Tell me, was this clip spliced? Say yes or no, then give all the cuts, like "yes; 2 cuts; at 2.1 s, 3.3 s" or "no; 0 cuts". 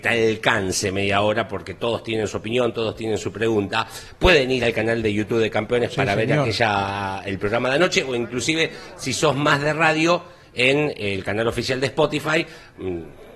no; 0 cuts